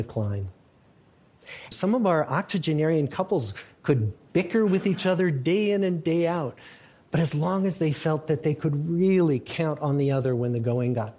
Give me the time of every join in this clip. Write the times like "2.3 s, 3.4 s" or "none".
1.7 s